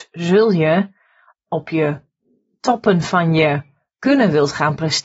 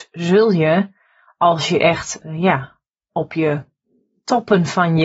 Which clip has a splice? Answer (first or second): first